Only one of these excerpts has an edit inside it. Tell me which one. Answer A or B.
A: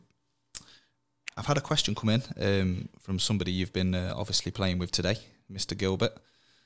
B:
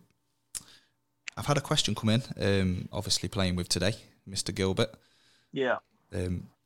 B